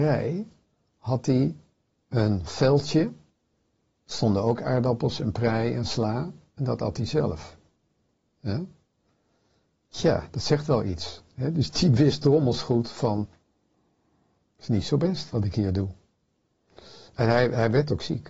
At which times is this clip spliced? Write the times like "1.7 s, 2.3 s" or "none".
none